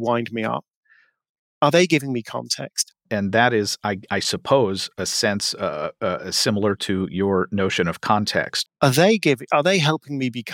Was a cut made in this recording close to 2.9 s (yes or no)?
yes